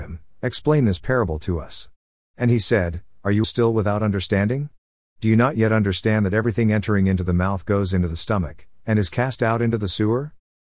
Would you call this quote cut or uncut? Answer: cut